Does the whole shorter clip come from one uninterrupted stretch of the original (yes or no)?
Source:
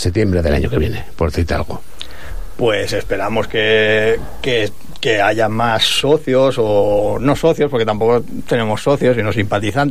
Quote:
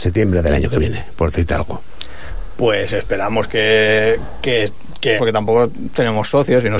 no